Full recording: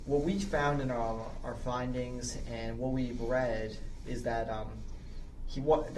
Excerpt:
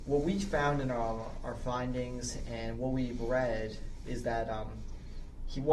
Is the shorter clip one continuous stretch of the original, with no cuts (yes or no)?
yes